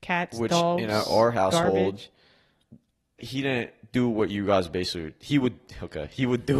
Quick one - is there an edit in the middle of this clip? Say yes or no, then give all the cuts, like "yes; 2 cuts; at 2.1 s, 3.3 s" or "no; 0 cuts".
yes; 1 cut; at 3.2 s